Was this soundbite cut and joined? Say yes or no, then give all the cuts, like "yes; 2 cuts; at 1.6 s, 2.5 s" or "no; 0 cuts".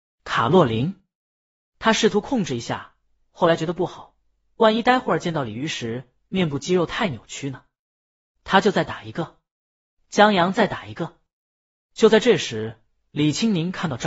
no; 0 cuts